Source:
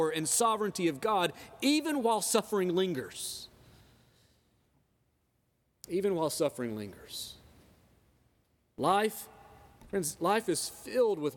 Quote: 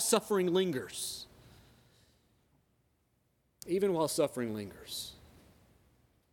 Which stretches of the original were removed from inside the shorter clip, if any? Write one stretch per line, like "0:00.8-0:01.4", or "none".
none